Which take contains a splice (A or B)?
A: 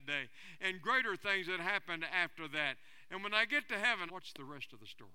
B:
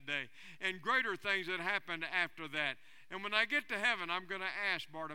A